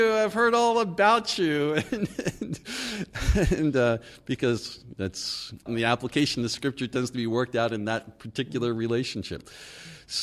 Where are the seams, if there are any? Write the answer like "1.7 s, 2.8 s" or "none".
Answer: 5.7 s